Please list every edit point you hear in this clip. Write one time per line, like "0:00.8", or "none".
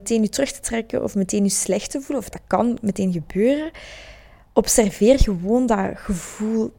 0:02.3